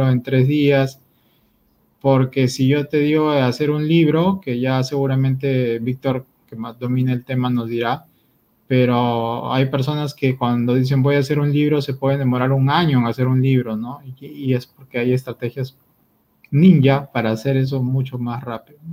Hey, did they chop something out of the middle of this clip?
no; 0 cuts

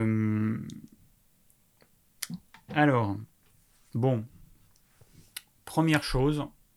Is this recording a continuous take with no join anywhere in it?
yes; 0 cuts

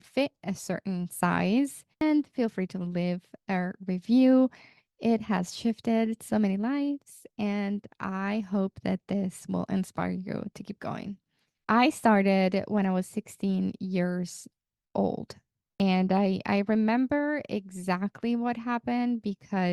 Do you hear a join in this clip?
yes; 1 cut; at 1.9 s

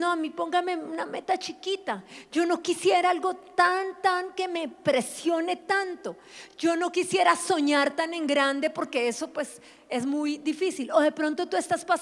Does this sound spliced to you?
no; 0 cuts

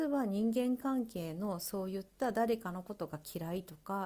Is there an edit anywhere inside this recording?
no; 0 cuts

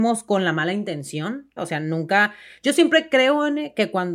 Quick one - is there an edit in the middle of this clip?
yes; 1 cut; at 1.6 s

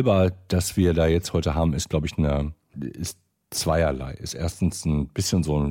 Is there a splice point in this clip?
yes; 1 cut; at 2.7 s

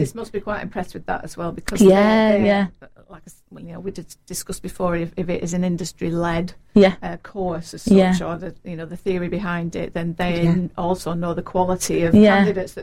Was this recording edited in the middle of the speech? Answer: no; 0 cuts

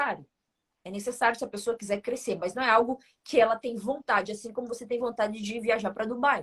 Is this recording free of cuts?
yes; 0 cuts

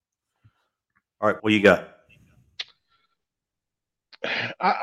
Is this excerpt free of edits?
no; 1 cut; at 1.4 s

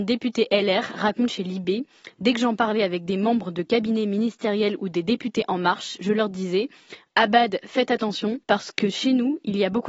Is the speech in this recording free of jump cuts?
no; 1 cut; at 8.4 s

